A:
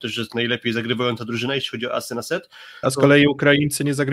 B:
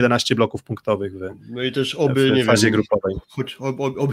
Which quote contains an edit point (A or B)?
A